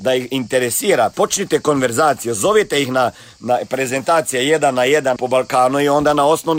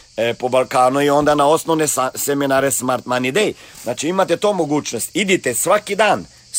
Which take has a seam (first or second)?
first